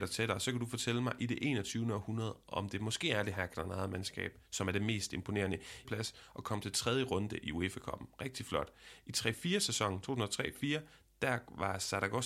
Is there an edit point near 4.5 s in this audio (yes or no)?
yes